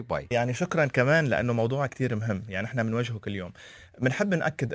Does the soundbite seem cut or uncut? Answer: cut